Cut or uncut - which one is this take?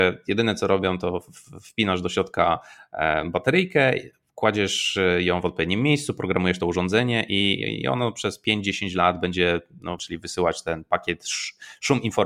cut